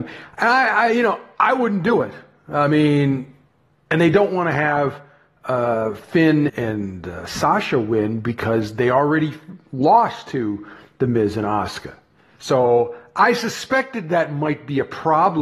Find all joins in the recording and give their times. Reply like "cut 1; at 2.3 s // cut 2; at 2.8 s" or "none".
cut 1; at 6.5 s // cut 2; at 12.4 s